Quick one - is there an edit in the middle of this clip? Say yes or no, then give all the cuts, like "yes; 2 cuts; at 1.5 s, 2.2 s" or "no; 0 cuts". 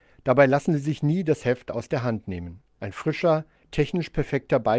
yes; 1 cut; at 3.6 s